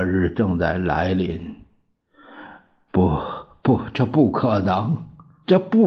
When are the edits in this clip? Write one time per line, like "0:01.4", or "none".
0:02.9